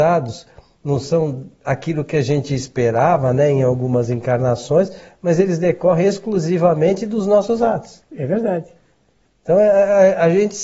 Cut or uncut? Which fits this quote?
uncut